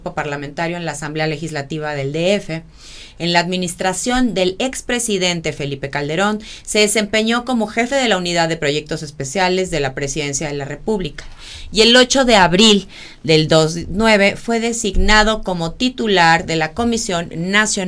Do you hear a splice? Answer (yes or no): no